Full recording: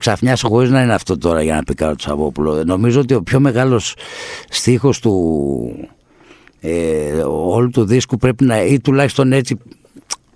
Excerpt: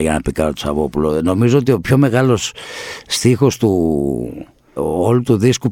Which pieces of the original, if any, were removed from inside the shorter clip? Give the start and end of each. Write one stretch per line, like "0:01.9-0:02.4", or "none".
0:06.2-0:07.2